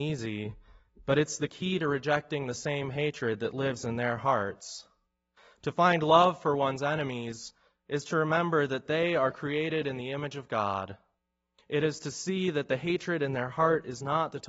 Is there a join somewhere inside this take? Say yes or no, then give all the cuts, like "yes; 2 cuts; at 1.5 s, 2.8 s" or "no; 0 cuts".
no; 0 cuts